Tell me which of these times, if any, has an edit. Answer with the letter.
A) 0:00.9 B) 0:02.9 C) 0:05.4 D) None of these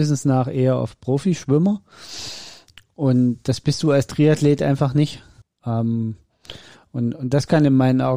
C